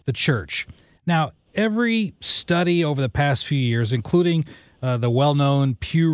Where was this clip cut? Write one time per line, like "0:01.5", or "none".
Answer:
none